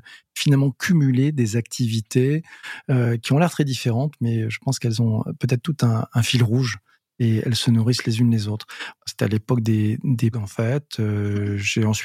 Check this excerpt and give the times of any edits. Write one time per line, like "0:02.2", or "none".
0:08.9
0:10.3